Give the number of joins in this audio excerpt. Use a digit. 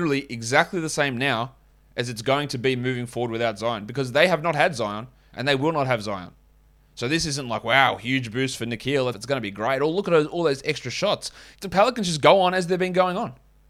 2